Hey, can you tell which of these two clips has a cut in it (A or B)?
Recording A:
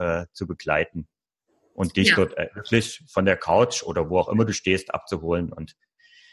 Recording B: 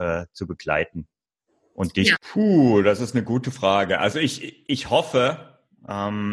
B